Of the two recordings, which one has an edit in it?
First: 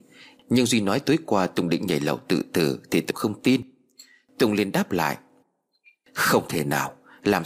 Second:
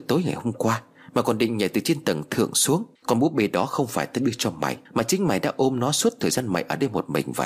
second; 2 cuts; at 3.0 s, 4.9 s

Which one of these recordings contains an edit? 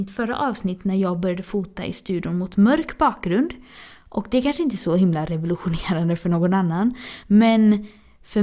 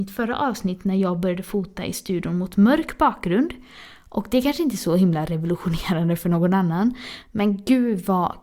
second; 1 cut; at 7.2 s

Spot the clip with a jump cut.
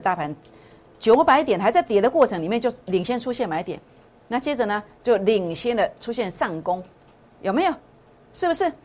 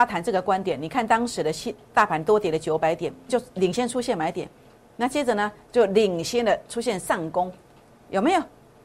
second; 1 cut; at 3.3 s

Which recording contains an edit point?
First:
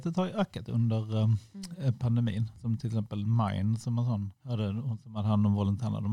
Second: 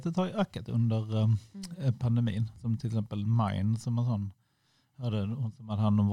first; 1 cut; at 4.4 s

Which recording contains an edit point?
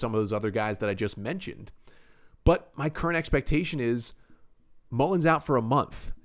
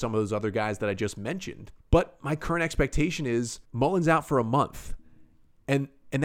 second; 2 cuts; at 1.8 s, 3.6 s

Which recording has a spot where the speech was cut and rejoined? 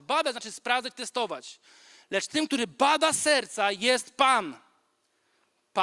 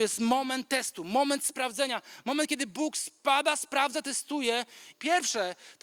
second; 1 cut; at 4.9 s

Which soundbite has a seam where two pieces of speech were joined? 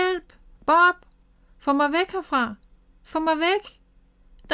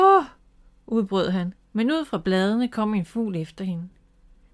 second; 1 cut; at 1.7 s

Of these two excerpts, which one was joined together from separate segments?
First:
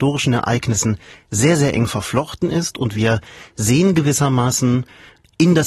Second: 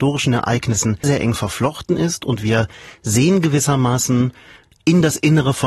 second; 1 cut; at 1.0 s

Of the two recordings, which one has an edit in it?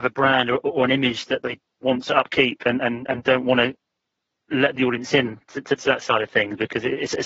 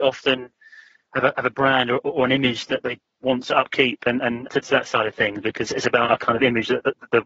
second; 2 cuts; at 4.5 s, 5.6 s

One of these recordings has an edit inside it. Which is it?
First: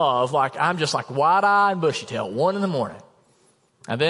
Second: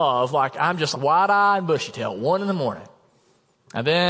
second; 1 cut; at 0.9 s

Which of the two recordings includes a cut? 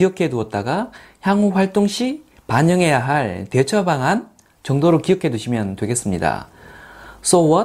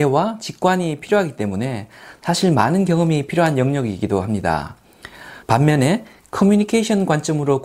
second; 1 cut; at 5.4 s

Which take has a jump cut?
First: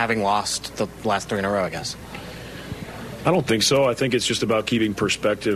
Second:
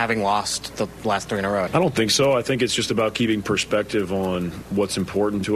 second; 1 cut; at 1.7 s

